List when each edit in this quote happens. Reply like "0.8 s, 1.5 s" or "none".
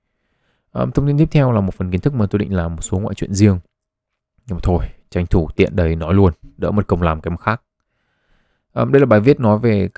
none